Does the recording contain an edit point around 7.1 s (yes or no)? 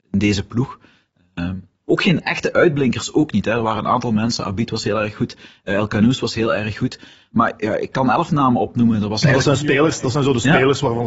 no